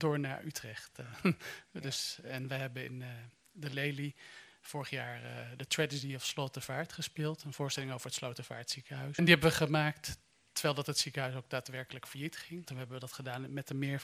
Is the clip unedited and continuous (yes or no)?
no